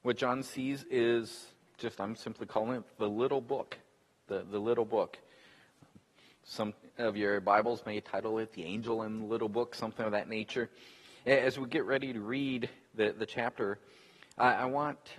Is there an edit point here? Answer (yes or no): no